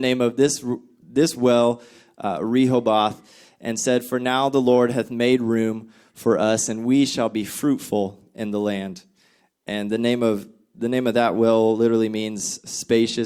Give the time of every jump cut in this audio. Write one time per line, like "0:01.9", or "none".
none